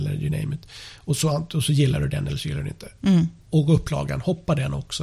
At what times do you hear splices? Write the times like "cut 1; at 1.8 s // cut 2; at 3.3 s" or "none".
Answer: cut 1; at 3.4 s

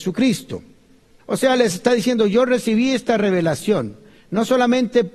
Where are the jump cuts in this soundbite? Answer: cut 1; at 1.2 s

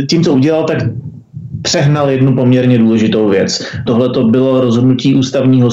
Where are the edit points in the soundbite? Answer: cut 1; at 3.9 s

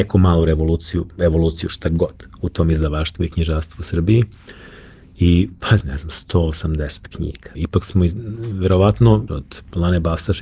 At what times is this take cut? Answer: cut 1; at 5.8 s // cut 2; at 7.5 s // cut 3; at 9.3 s

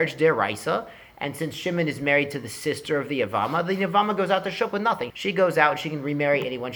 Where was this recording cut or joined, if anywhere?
cut 1; at 5.1 s

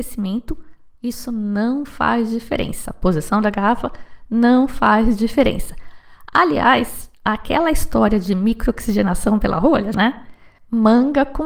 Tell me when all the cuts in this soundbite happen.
cut 1; at 9.9 s

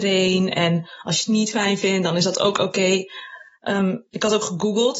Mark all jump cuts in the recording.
none

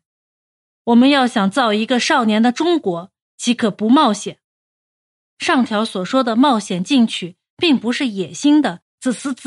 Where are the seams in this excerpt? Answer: cut 1; at 5.2 s

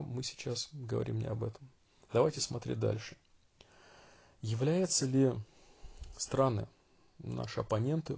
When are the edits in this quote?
none

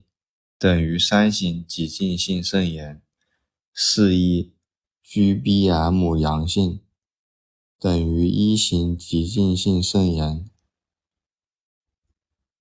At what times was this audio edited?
cut 1; at 4.8 s

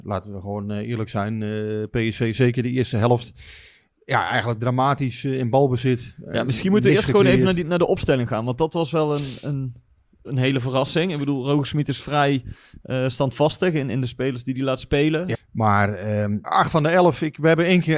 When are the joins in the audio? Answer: cut 1; at 15.3 s // cut 2; at 16.4 s

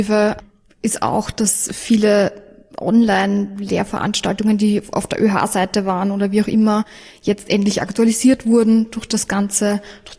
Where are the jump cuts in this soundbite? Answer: none

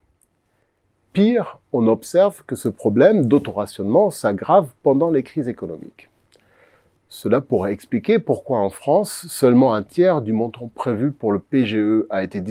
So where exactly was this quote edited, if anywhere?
cut 1; at 1.6 s

